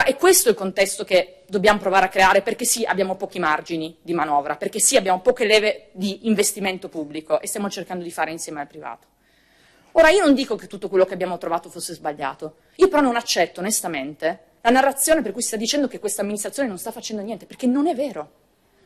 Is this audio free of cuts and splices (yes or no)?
yes